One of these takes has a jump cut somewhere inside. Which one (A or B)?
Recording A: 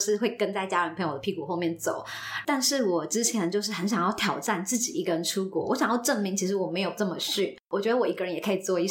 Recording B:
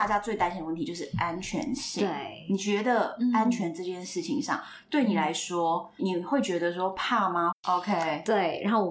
B